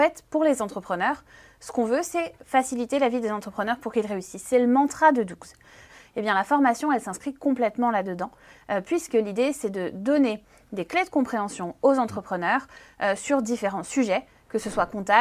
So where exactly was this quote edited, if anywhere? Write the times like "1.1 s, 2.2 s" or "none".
none

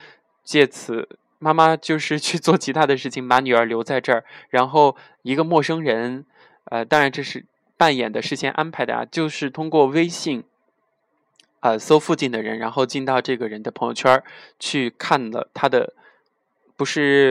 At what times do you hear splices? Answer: none

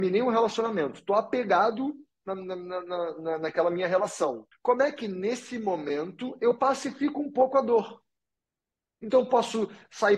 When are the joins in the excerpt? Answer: 4.5 s

